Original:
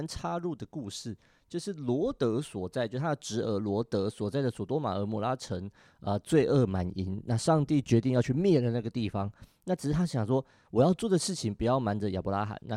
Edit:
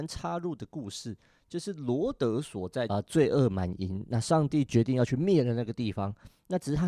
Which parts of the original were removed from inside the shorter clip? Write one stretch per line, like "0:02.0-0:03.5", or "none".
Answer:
0:02.9-0:06.1